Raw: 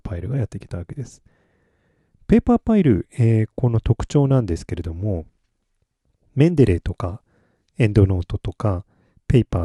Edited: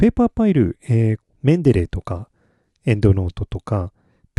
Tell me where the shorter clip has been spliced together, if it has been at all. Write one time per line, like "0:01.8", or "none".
0:01.2

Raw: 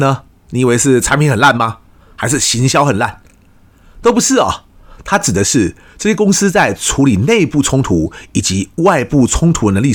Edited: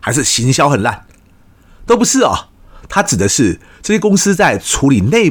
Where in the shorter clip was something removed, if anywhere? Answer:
none

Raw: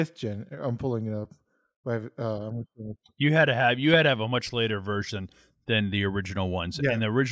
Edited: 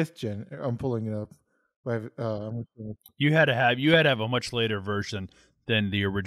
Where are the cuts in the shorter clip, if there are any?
none

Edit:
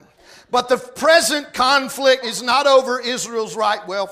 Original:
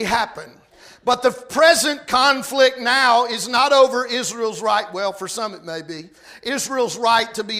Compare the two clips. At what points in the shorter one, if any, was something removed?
0:02.2

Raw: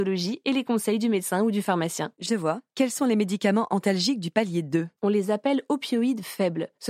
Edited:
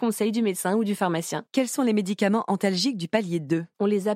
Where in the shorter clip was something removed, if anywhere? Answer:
0:01.5

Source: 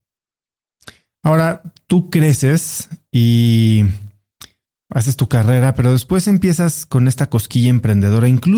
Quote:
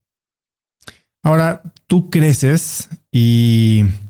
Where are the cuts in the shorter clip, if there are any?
none

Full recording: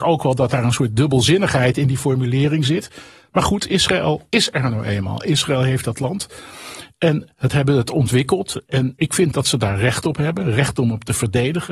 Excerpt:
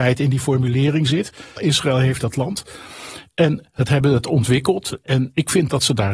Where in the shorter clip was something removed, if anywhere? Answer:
0:01.6

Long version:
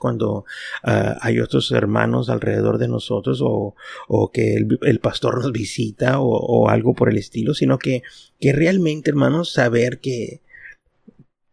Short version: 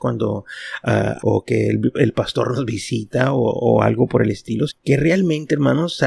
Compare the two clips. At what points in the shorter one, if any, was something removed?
0:01.2
0:04.7

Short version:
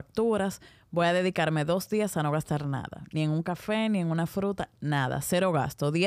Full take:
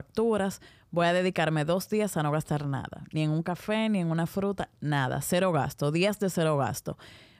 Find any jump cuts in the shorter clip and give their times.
none

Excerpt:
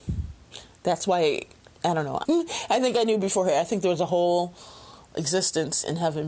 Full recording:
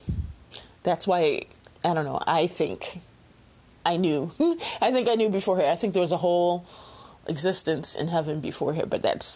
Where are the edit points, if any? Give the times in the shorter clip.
0:02.3

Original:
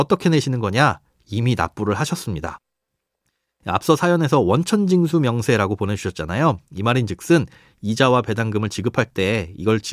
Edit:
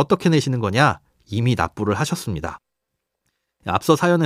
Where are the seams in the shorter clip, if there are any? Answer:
none

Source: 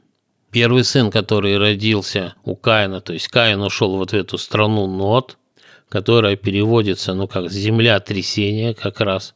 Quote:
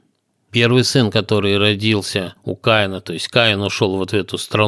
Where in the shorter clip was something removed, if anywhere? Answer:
none

